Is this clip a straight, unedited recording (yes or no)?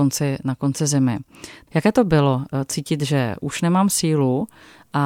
no